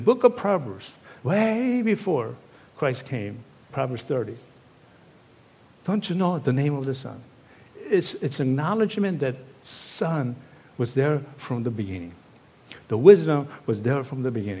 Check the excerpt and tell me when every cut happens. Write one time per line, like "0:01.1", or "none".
0:03.7